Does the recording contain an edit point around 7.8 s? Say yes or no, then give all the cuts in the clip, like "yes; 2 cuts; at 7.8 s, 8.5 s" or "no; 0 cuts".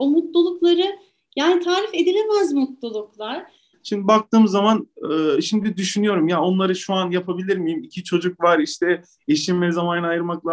no; 1 cut; at 3.7 s